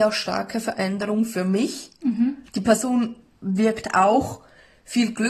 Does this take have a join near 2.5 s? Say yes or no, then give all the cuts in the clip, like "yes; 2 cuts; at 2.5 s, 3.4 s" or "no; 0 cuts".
yes; 1 cut; at 2.5 s